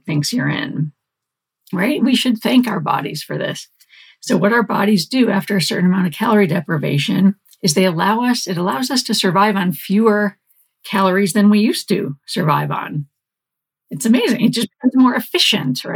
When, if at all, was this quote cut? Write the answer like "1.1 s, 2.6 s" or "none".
none